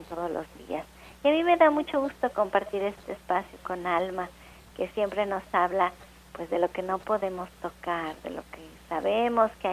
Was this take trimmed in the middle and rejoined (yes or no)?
no